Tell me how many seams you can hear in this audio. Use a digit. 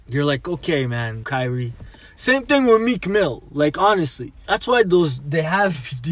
2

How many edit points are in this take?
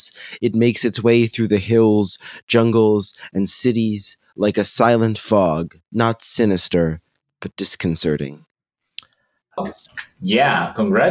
2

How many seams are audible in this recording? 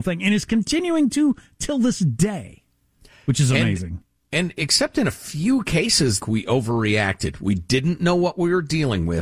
1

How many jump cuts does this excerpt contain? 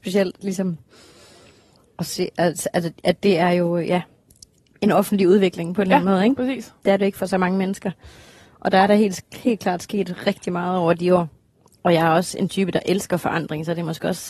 0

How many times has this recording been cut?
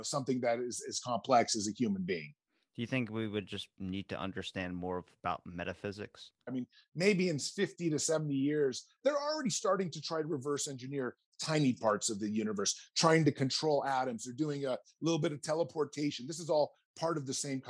1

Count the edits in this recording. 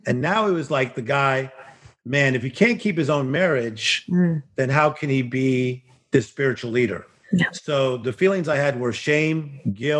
0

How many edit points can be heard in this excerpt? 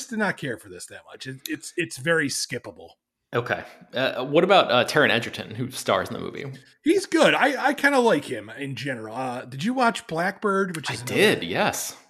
0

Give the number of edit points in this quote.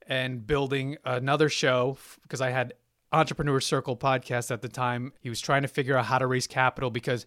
1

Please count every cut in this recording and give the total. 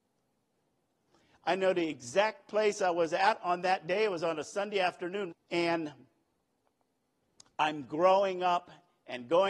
1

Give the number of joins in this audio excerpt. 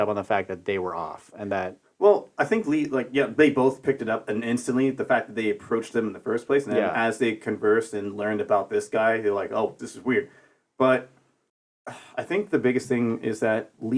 1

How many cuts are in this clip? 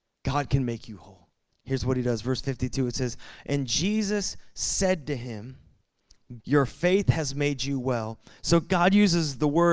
3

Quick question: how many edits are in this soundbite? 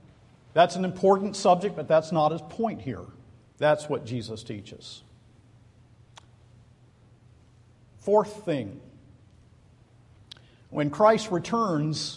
1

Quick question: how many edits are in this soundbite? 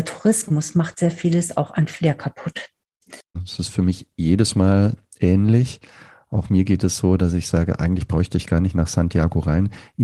1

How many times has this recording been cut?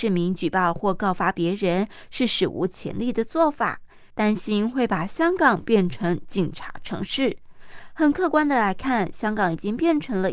0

